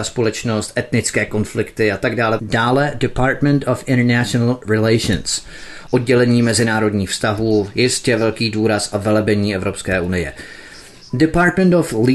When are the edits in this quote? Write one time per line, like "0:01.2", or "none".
0:02.4